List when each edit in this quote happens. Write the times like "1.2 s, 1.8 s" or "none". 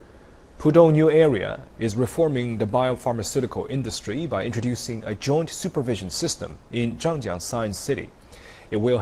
1.6 s